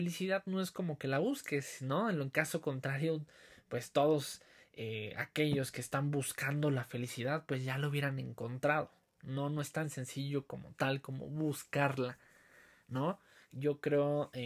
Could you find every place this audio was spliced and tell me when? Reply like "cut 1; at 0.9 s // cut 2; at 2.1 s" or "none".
none